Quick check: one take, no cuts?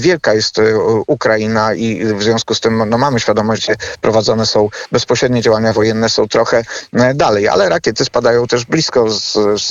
no; 1 cut; at 3.6 s

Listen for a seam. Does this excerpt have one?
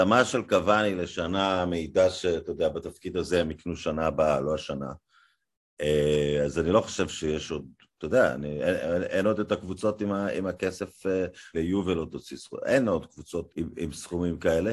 yes; 2 cuts; at 11.5 s, 13.5 s

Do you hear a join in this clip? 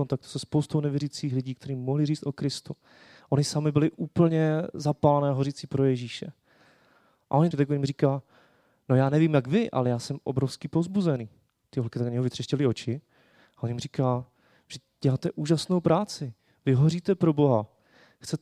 yes; 1 cut; at 7.5 s

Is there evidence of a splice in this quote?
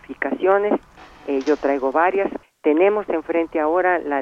yes; 1 cut; at 2.4 s

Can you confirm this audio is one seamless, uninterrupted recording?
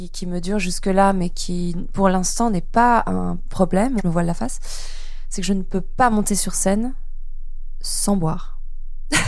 no; 1 cut; at 4.0 s

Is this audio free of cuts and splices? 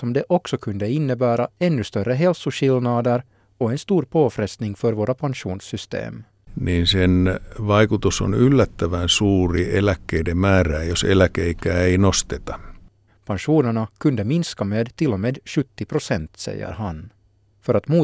no; 1 cut; at 13.1 s

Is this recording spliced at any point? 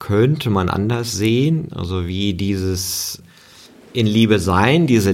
no; 0 cuts

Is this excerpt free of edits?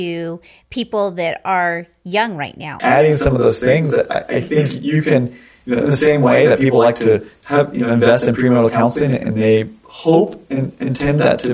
no; 1 cut; at 2.8 s

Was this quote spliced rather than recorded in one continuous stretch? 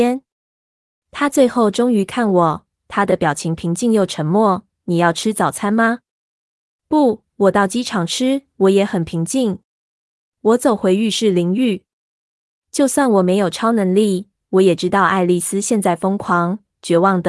no; 0 cuts

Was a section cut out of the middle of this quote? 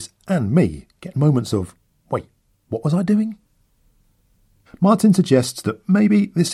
no; 0 cuts

